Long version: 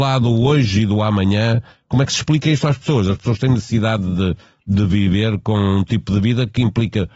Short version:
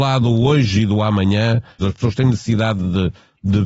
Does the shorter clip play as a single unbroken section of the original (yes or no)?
no